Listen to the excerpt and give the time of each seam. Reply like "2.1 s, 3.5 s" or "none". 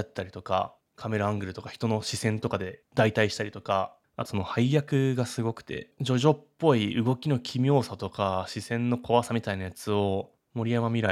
4.3 s